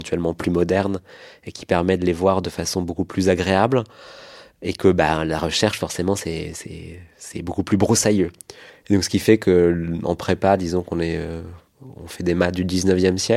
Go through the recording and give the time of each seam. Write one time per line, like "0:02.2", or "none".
0:08.7